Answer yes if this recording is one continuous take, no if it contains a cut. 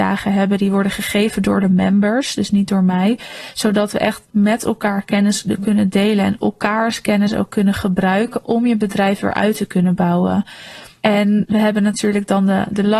yes